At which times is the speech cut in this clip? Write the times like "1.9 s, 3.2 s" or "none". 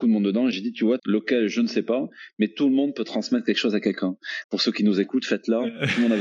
1.0 s, 4.4 s